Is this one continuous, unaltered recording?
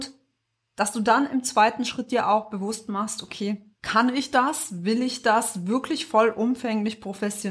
no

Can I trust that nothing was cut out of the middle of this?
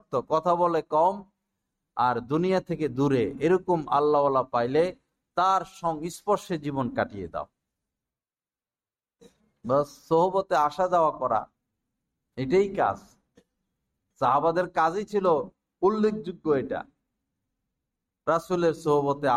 yes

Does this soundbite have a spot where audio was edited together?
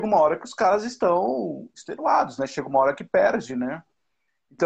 no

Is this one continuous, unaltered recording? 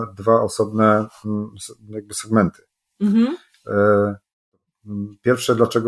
yes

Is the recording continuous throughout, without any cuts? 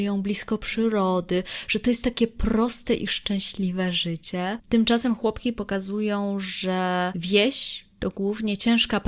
yes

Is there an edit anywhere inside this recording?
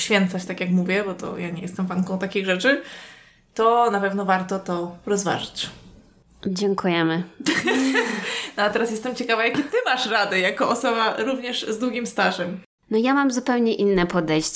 no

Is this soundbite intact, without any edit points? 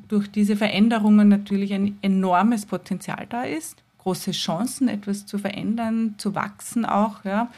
yes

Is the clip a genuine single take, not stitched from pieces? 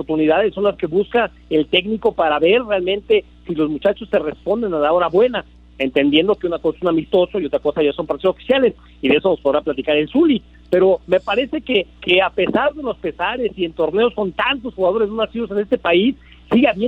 yes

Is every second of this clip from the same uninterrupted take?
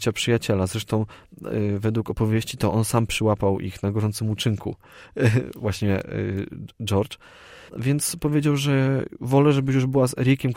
no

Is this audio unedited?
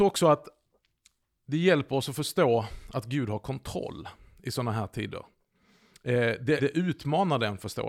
no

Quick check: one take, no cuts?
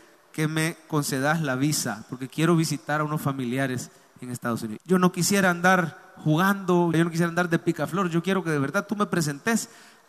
no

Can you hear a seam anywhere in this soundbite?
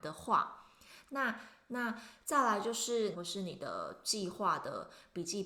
yes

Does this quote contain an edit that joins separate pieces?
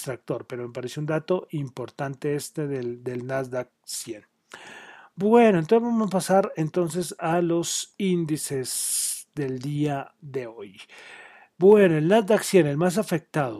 no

